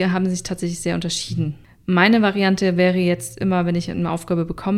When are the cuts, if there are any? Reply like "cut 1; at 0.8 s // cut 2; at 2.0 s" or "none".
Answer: none

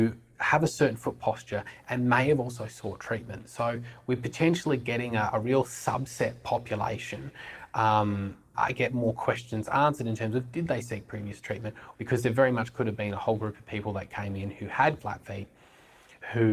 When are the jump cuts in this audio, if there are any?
cut 1; at 8.5 s // cut 2; at 11.9 s // cut 3; at 15.0 s

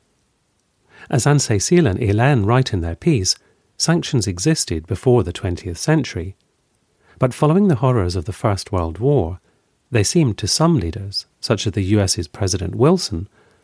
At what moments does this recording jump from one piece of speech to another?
none

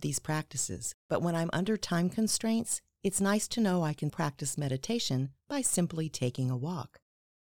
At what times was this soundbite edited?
cut 1; at 4.1 s

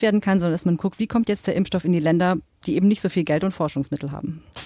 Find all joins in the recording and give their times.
none

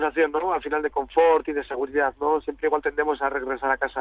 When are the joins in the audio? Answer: none

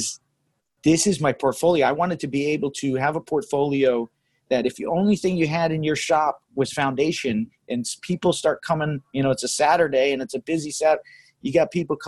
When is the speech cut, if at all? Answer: none

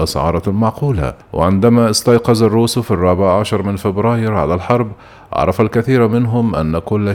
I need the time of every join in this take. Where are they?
cut 1; at 1.2 s

